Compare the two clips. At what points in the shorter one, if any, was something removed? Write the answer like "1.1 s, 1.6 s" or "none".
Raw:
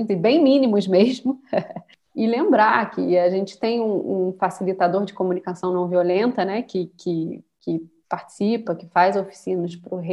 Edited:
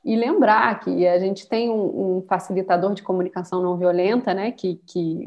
none